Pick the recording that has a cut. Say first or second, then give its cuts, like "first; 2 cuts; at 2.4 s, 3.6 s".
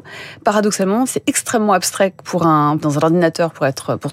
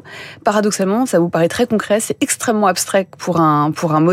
first; 2 cuts; at 1.1 s, 2.8 s